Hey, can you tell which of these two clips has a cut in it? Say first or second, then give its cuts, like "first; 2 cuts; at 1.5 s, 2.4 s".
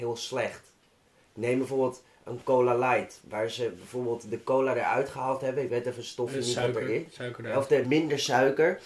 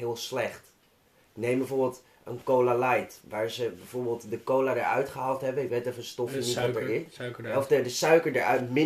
first; 1 cut; at 7.8 s